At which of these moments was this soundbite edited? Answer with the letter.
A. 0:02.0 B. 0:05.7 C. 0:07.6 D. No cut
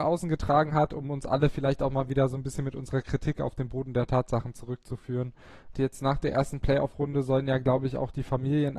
B